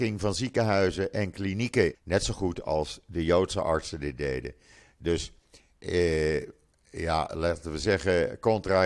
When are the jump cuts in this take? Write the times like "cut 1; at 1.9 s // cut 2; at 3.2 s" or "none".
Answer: cut 1; at 1.9 s